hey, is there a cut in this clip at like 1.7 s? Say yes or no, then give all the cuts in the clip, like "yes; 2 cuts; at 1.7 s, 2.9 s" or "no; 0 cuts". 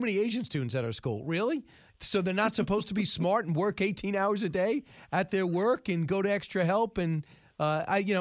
no; 0 cuts